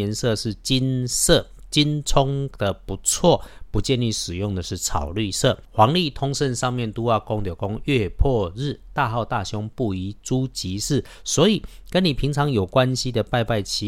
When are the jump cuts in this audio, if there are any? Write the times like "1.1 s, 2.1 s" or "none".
5.7 s